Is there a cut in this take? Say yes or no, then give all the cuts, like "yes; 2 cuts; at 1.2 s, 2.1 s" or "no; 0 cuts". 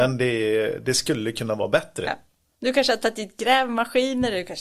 no; 0 cuts